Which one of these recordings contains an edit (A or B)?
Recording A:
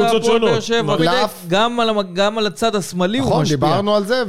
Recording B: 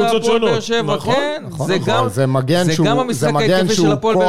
A